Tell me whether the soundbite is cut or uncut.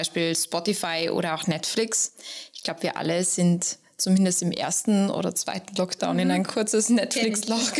uncut